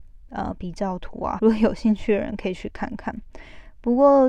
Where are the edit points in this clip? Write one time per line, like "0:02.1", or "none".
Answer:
0:01.4